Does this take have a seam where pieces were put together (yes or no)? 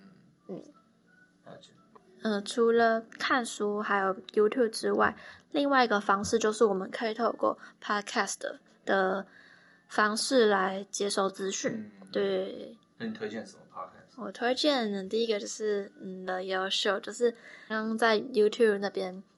yes